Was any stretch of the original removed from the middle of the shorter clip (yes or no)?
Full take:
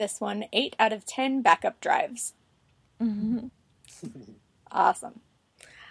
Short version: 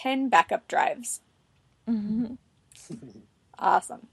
no